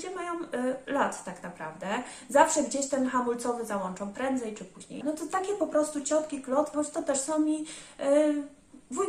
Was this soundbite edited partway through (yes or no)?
yes